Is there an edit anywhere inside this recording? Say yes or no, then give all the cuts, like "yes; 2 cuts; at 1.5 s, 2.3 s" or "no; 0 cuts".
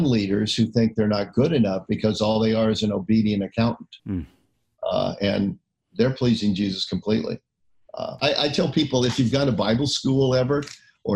yes; 2 cuts; at 4.0 s, 8.2 s